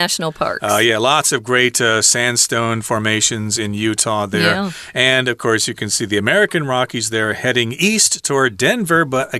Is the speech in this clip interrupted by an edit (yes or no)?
no